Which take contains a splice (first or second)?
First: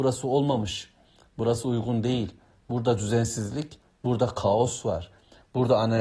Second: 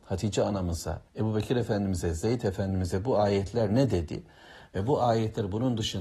second